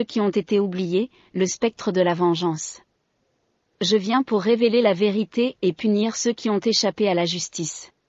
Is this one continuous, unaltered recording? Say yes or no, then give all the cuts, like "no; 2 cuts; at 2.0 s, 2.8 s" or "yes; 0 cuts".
yes; 0 cuts